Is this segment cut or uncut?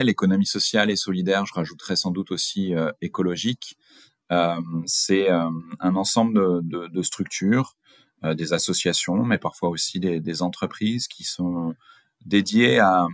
uncut